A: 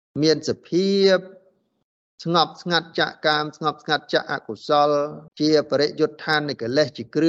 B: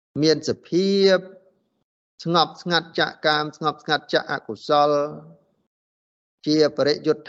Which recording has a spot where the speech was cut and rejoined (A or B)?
A